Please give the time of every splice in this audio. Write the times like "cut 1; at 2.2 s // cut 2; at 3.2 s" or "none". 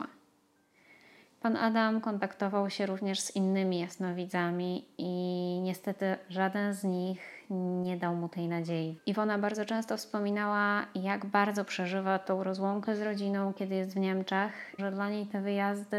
cut 1; at 9.0 s // cut 2; at 14.8 s